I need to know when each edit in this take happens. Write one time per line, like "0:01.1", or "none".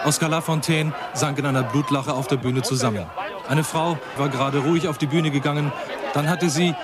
0:04.2